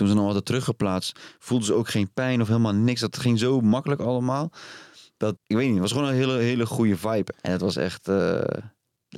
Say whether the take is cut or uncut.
cut